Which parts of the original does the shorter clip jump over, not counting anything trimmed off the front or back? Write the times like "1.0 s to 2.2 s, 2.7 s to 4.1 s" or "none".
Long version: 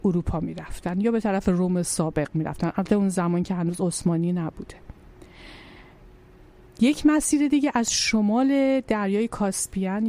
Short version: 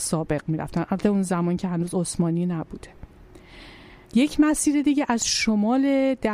5.9 s to 6.7 s

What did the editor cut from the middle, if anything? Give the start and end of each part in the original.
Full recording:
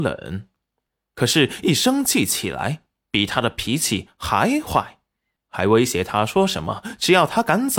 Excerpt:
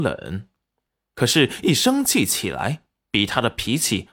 none

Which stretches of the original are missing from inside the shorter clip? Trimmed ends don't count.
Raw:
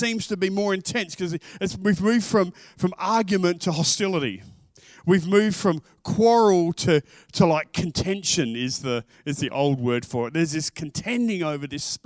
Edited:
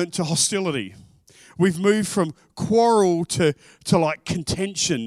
none

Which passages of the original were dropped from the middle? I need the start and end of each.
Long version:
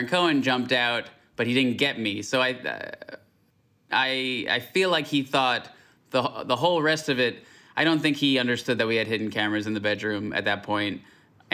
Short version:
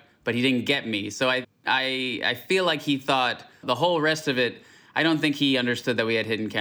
2.6 s to 3.7 s, 5.9 s to 6.4 s

